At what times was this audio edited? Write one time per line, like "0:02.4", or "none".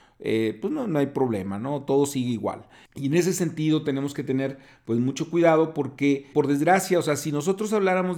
0:02.9
0:06.3